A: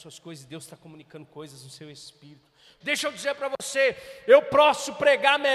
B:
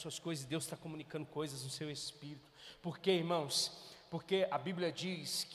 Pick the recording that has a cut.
A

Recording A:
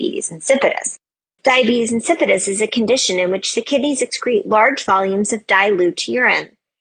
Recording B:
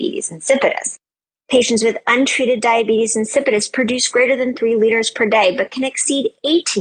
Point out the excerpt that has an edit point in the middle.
B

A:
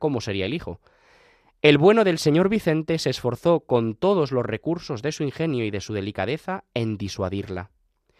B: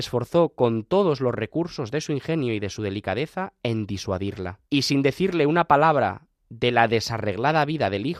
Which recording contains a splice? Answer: B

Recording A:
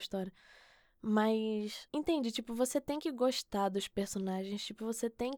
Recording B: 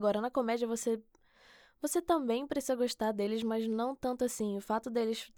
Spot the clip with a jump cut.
A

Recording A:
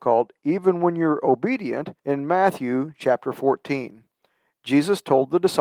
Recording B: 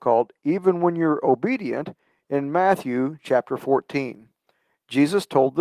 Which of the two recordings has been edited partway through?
A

